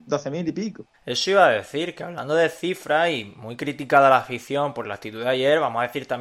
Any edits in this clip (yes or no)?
yes